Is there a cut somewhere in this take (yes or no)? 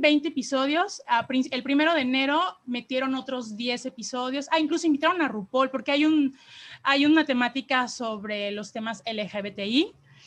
no